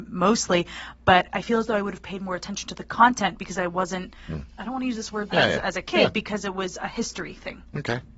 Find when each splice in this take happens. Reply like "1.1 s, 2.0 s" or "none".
5.3 s